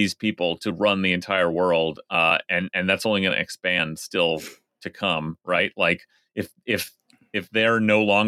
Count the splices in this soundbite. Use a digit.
0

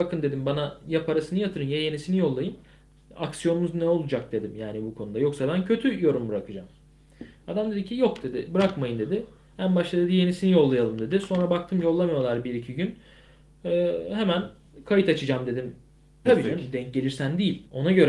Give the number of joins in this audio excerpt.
1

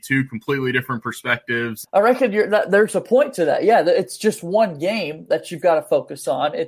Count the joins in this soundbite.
1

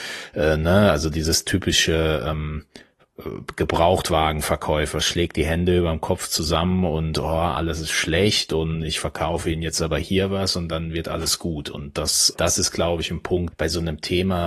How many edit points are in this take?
2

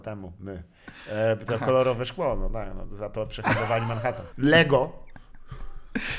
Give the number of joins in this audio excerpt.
1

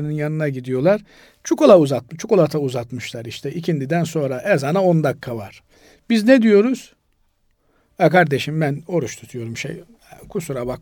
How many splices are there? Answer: 0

